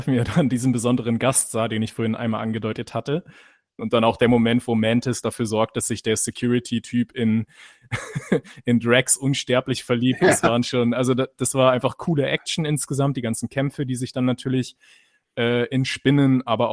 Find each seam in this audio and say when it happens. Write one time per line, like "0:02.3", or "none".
0:03.8